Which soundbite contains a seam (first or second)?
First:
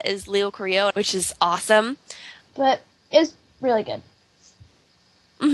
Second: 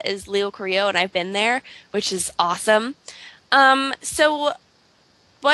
first